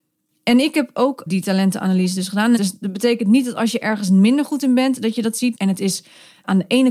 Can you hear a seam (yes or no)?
yes